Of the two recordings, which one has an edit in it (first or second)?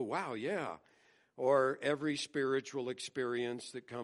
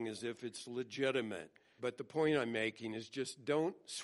second